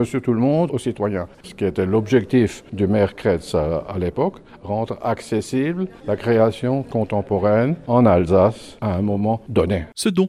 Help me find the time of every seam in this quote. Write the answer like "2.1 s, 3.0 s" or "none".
none